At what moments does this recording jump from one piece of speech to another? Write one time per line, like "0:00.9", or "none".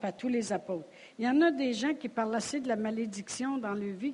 0:01.1